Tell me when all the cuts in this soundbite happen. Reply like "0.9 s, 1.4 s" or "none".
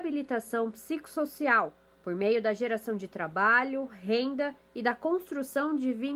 none

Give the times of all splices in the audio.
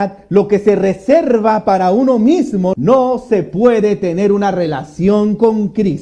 2.7 s

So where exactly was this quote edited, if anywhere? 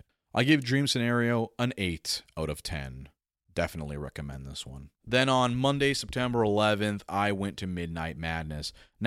4.9 s

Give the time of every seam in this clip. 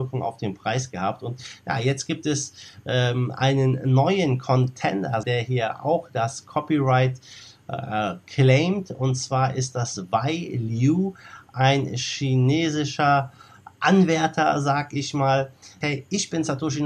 5.2 s, 15.8 s

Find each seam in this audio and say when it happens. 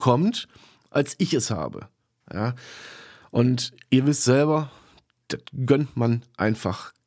2.2 s

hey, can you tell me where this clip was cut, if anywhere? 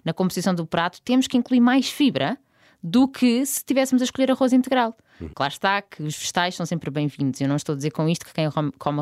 5.3 s

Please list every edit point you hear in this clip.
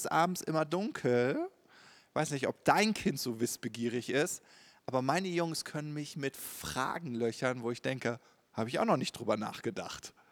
8.5 s

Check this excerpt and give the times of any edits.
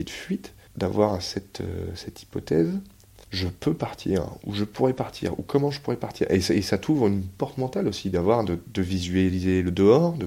none

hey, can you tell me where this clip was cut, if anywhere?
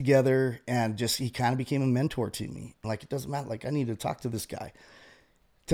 2.8 s

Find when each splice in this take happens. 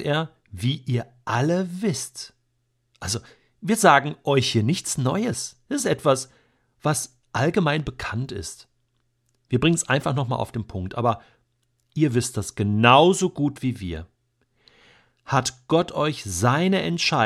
none

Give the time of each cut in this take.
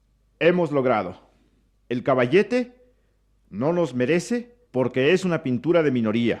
1.7 s, 4.6 s

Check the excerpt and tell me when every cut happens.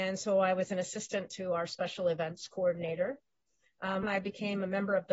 4.0 s

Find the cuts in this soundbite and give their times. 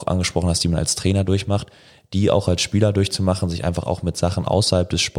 none

